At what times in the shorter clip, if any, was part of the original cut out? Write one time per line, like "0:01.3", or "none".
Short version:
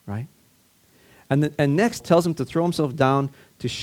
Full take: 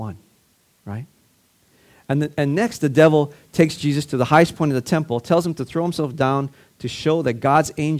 0:02.0